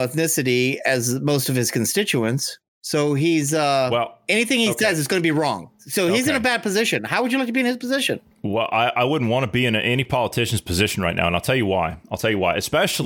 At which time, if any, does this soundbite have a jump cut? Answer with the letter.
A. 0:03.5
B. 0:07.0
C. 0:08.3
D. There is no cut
D